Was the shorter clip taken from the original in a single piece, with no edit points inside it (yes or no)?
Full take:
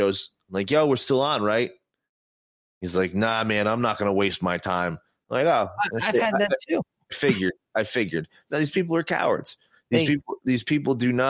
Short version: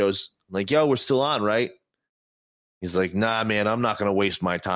yes